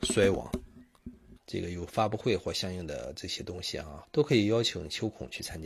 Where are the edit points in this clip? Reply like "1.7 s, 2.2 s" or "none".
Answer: 1.4 s, 4.0 s